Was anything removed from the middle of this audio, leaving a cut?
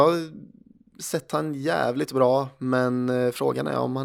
no; 0 cuts

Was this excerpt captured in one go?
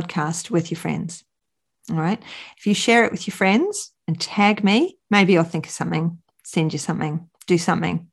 no; 1 cut; at 5.0 s

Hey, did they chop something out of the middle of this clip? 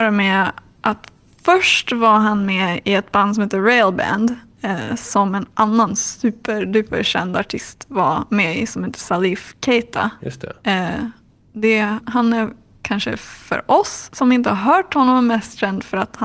yes; 1 cut; at 12.0 s

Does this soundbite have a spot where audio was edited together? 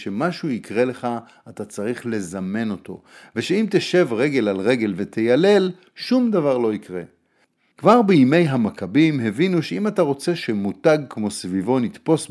yes; 1 cut; at 7.7 s

